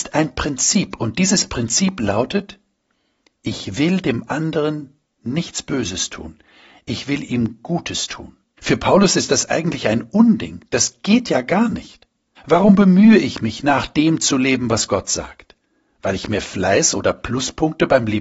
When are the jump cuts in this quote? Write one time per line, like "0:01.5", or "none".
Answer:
0:08.6
0:12.4